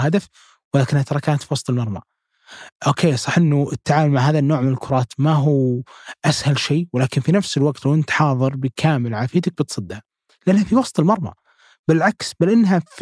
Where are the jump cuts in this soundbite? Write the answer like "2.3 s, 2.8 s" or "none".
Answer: none